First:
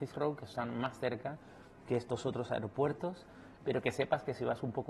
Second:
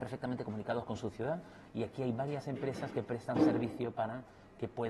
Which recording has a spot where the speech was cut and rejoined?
first; 1 cut; at 3.6 s

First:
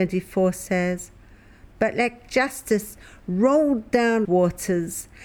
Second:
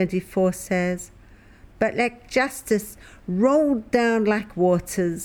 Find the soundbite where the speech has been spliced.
first; 1 cut; at 4.2 s

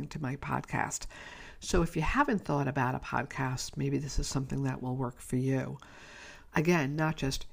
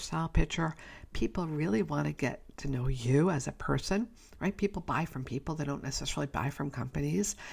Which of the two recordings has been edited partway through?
first; 1 cut; at 6.5 s

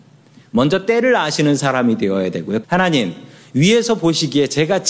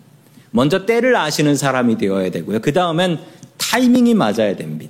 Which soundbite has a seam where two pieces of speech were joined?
first; 1 cut; at 2.6 s

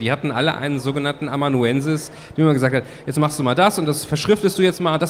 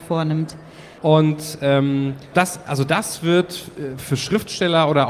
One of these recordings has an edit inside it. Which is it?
second; 2 cuts; at 1.0 s, 2.3 s

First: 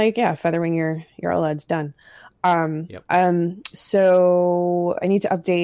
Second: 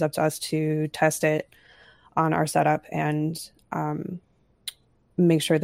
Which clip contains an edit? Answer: first; 1 cut; at 3.0 s

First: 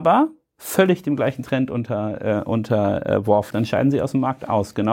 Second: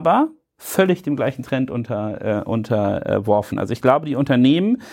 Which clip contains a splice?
first; 1 cut; at 3.5 s

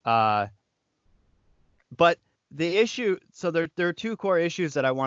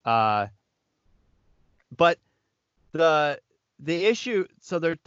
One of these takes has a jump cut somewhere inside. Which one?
first; 1 cut; at 2.4 s

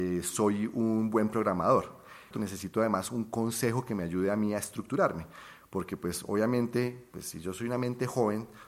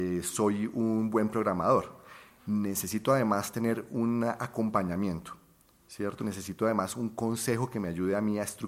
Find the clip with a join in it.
first; 1 cut; at 2.3 s

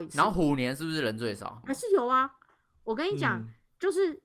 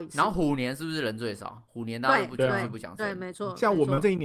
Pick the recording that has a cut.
first; 1 cut; at 1.6 s

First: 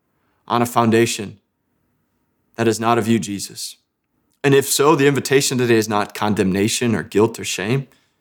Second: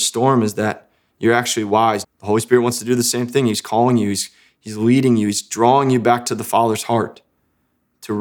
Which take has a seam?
second; 1 cut; at 2.0 s

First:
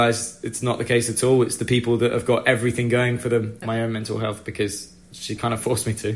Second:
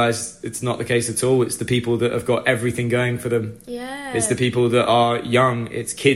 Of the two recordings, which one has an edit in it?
first; 1 cut; at 3.6 s

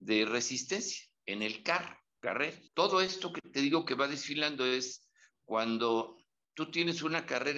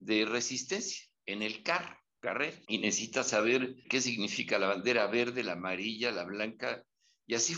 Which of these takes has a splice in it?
second; 2 cuts; at 2.6 s, 3.8 s

